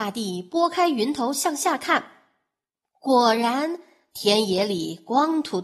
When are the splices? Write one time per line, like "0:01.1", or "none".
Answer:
none